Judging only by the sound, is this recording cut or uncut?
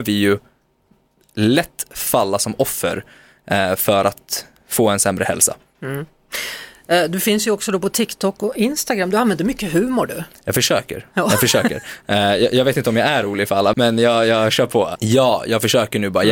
cut